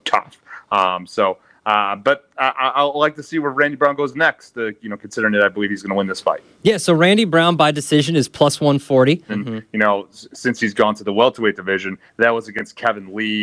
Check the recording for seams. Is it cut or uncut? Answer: cut